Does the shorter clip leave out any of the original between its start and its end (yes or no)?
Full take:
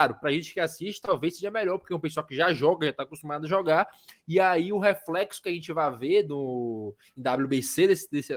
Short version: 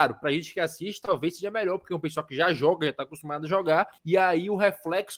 yes